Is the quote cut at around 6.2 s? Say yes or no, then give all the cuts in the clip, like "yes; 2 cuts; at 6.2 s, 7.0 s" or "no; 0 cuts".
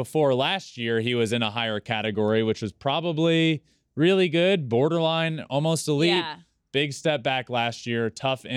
no; 0 cuts